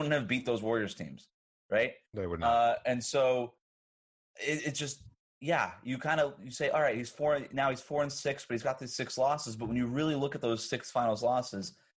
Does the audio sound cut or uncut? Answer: uncut